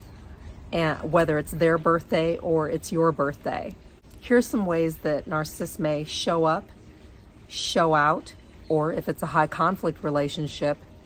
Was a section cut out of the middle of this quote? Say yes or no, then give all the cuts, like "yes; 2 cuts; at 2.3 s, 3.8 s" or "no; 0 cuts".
no; 0 cuts